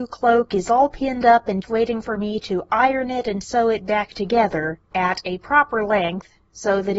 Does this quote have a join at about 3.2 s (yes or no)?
no